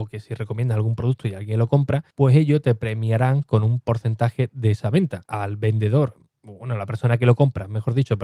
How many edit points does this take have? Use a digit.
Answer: 2